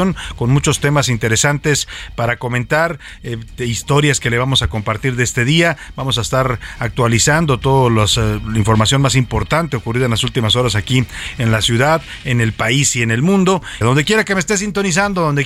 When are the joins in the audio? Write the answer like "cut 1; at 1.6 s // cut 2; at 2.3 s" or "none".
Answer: cut 1; at 13.8 s